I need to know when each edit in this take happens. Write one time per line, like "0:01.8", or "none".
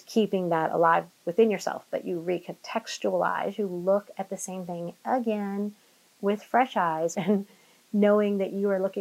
0:07.1